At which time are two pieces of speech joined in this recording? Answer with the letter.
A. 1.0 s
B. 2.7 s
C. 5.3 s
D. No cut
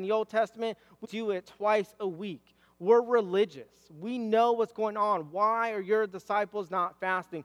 A